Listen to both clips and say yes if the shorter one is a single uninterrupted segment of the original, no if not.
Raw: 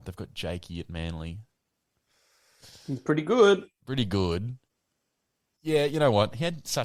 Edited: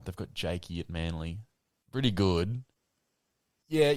no